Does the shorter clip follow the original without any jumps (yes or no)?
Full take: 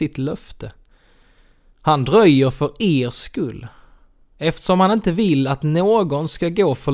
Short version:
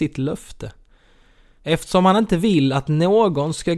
no